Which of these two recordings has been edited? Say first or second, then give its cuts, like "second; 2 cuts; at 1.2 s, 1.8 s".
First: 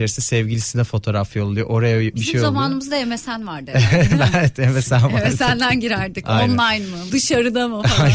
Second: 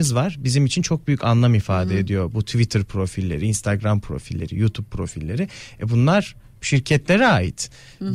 first; 1 cut; at 7.1 s